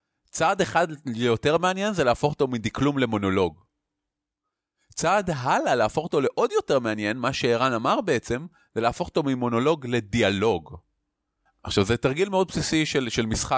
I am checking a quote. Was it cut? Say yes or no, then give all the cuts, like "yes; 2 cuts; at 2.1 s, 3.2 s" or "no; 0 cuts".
yes; 1 cut; at 11.5 s